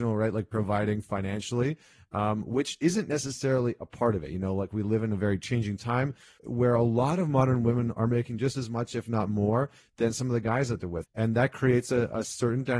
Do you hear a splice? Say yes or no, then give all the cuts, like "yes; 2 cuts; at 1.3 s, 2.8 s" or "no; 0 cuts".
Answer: yes; 2 cuts; at 6.4 s, 11.0 s